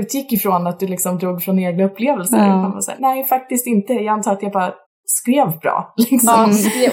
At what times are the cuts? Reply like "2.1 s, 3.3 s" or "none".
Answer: 3.0 s